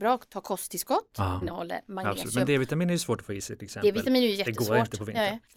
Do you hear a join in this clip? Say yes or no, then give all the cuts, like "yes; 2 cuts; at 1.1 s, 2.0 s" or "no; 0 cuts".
yes; 1 cut; at 1.4 s